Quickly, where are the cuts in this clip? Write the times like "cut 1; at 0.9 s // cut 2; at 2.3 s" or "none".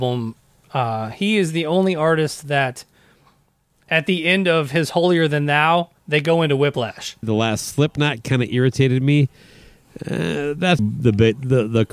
cut 1; at 6.0 s // cut 2; at 7.2 s // cut 3; at 10.8 s